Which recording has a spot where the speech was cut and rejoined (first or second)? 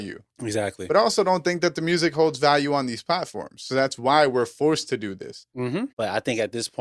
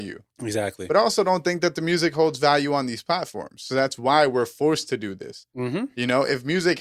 first